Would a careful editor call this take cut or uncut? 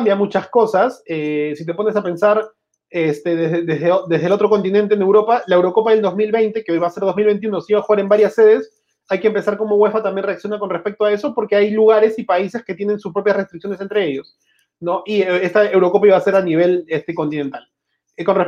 uncut